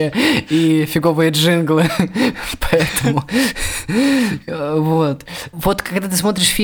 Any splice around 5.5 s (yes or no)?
yes